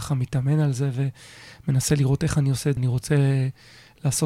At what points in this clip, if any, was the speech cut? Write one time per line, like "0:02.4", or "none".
0:02.8